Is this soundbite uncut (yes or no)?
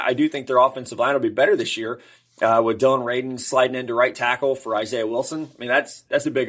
yes